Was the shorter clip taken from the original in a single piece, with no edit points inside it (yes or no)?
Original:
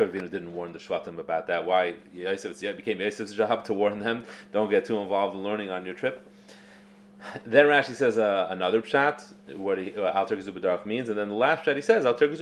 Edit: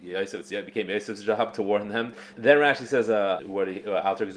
no